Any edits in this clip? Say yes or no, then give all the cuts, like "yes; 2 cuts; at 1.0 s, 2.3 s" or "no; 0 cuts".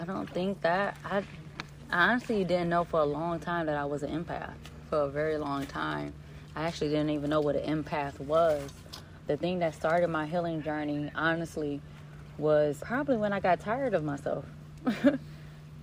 yes; 2 cuts; at 9.3 s, 12.8 s